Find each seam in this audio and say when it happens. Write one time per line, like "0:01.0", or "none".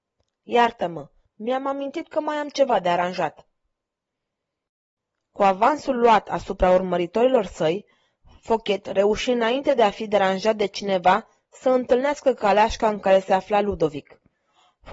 none